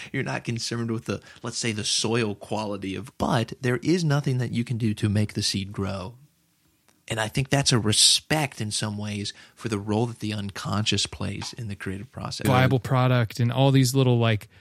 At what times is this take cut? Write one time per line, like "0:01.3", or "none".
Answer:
0:03.1
0:12.4